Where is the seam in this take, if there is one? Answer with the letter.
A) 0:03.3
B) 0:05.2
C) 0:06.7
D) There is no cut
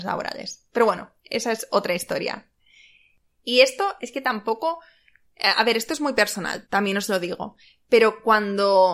C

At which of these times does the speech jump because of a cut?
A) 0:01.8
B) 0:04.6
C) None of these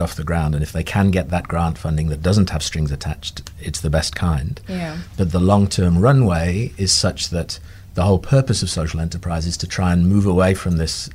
C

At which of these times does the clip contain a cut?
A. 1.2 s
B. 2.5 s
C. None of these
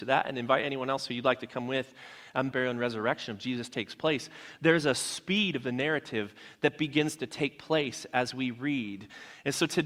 B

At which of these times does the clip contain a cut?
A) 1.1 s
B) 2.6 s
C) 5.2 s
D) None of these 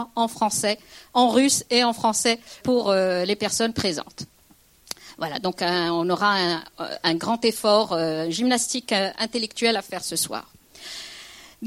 B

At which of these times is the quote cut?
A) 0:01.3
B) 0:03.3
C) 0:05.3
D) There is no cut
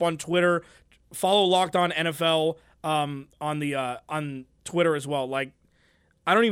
D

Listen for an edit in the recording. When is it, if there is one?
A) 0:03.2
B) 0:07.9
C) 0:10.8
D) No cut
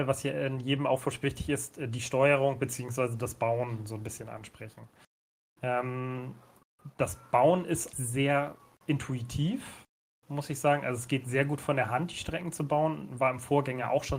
B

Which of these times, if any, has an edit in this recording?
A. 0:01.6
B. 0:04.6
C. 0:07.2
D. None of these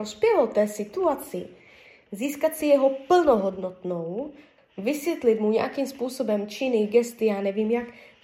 B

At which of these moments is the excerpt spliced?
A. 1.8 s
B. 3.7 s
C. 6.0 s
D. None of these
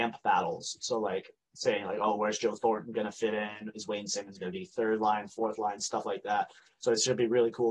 D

